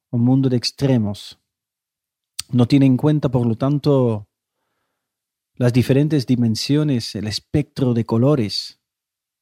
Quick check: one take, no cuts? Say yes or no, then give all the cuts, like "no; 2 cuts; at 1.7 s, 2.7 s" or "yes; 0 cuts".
yes; 0 cuts